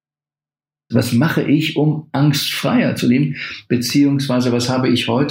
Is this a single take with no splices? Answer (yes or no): no